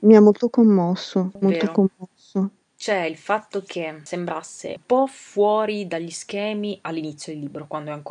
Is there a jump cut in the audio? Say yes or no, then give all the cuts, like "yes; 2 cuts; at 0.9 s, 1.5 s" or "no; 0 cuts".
yes; 1 cut; at 1.4 s